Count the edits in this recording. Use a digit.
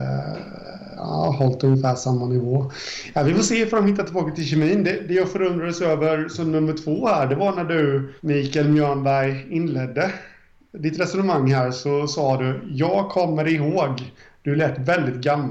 1